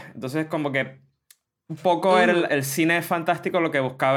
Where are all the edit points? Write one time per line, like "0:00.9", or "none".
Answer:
0:02.5